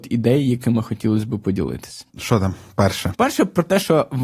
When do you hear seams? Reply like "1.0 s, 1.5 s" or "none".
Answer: 2.1 s, 3.1 s